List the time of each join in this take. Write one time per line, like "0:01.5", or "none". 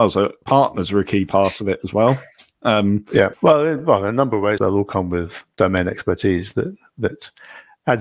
0:03.3
0:04.6